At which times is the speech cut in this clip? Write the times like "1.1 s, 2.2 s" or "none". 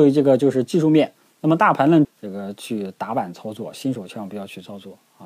2.0 s